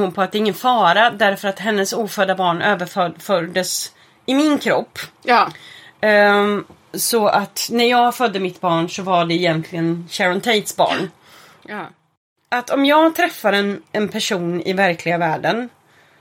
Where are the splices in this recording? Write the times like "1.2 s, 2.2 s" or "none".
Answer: 11.6 s